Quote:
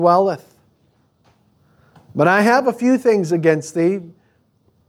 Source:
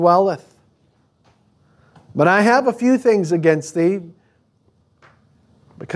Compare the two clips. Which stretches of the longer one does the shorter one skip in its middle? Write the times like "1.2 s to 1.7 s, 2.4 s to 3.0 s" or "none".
none

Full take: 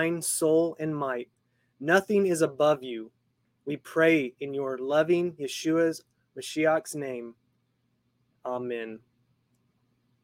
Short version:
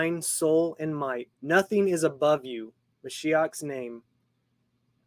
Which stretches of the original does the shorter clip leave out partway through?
1.3 s to 1.7 s, 3.3 s to 6.3 s

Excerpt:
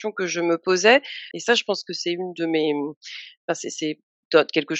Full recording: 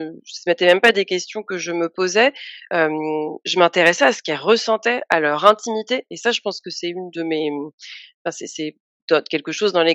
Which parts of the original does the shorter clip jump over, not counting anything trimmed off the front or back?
2.6 s to 6.1 s

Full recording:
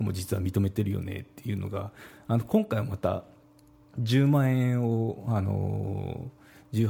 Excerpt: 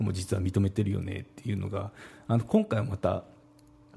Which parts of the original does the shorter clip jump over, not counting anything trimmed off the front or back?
none

